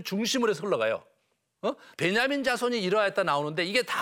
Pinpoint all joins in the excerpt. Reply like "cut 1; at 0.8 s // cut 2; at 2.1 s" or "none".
cut 1; at 1.9 s